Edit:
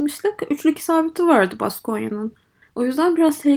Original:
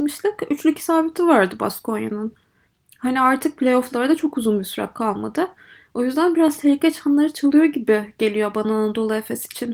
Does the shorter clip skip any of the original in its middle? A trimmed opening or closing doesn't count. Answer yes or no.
yes